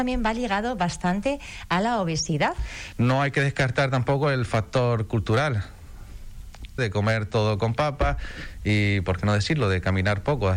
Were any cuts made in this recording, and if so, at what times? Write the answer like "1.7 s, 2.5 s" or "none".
2.9 s, 6.8 s